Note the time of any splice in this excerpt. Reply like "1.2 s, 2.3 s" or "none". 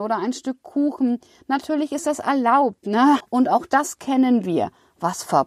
3.2 s